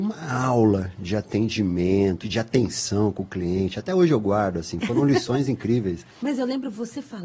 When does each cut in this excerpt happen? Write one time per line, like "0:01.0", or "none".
0:02.2